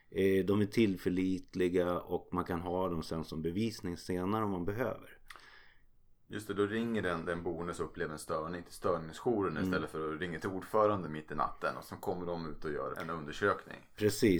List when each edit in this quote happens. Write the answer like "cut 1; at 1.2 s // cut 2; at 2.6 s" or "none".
cut 1; at 12.9 s